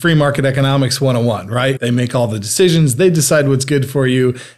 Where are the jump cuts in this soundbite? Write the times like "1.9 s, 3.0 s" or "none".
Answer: 1.8 s